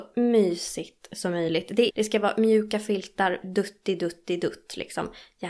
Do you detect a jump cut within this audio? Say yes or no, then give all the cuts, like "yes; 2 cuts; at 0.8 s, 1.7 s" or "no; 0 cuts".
yes; 2 cuts; at 1.9 s, 3.4 s